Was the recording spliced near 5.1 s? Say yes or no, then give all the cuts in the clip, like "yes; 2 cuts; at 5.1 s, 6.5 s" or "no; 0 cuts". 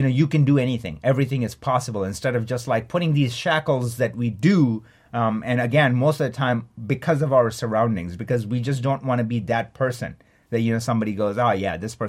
no; 0 cuts